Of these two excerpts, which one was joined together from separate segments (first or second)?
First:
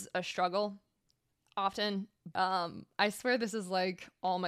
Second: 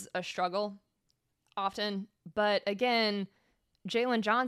first